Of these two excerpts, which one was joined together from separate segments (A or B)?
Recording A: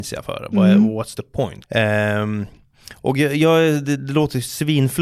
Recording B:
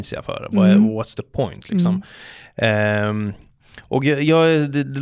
A